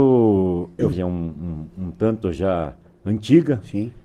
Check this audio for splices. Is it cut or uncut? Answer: cut